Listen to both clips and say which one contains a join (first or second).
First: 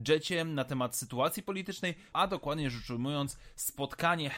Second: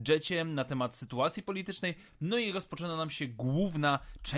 first